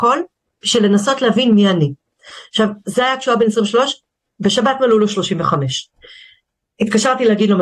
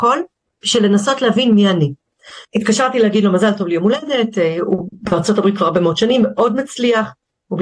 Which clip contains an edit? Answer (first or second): second